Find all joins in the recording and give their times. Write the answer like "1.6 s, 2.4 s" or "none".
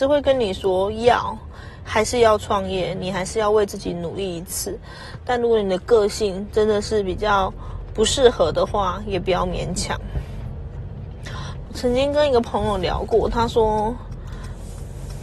11.7 s